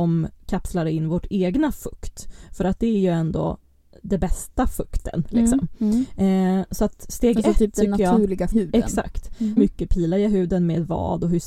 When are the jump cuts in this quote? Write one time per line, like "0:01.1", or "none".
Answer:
0:08.5
0:09.6

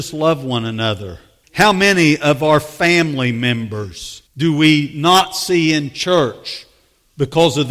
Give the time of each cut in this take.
0:01.4
0:04.3

